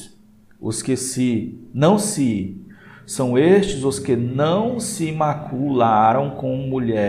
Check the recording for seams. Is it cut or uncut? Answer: uncut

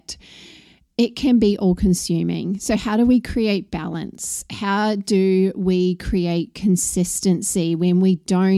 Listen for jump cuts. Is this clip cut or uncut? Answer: uncut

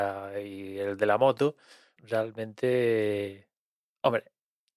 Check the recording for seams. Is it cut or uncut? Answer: cut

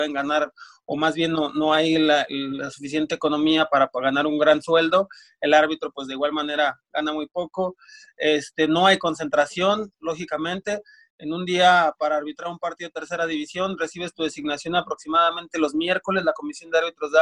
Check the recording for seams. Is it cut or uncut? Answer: uncut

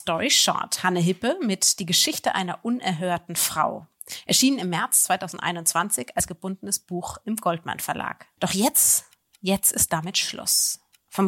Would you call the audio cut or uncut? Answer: cut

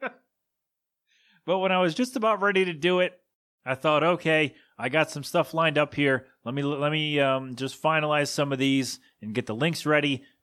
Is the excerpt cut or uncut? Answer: uncut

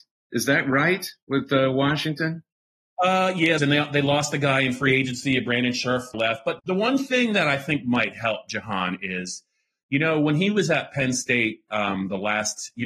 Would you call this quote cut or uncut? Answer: cut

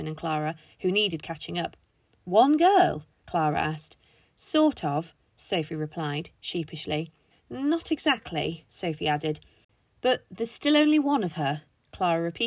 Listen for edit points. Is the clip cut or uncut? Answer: cut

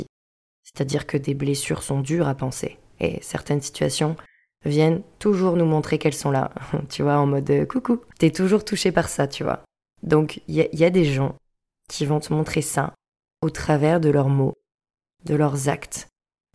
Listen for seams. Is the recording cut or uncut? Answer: uncut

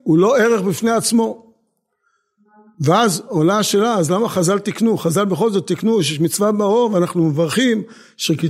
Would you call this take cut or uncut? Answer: uncut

